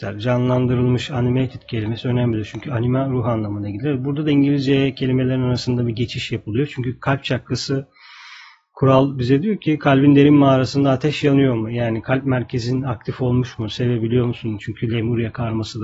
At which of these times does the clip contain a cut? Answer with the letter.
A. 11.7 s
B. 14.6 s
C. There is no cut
B